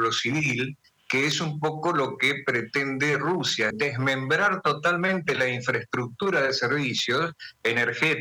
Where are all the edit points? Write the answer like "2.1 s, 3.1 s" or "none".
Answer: 3.7 s